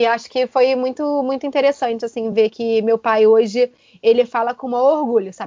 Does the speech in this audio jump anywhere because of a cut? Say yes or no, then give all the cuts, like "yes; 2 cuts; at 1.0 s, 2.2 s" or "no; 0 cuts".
no; 0 cuts